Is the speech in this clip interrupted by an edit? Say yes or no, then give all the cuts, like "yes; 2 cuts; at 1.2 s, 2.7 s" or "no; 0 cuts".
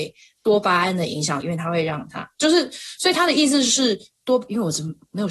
yes; 1 cut; at 1.4 s